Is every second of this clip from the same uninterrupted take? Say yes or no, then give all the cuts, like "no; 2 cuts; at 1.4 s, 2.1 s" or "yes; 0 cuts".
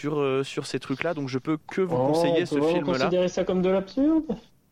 yes; 0 cuts